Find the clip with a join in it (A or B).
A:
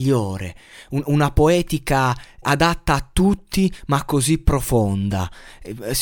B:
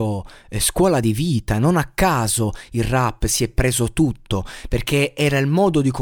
A